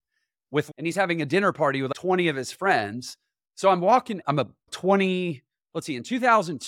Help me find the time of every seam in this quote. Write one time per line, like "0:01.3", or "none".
0:03.4